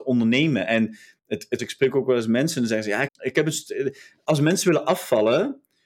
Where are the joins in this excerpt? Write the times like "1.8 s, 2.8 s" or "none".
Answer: 1.6 s, 3.1 s